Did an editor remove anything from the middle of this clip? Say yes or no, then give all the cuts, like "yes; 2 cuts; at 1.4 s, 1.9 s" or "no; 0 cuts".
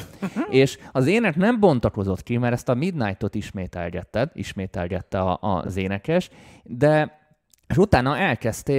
no; 0 cuts